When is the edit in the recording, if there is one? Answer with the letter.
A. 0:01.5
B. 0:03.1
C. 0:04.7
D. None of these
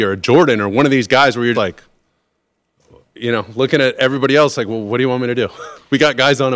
A